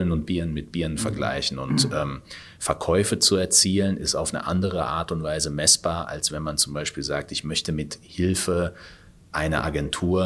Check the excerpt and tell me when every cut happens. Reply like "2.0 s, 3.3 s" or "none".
none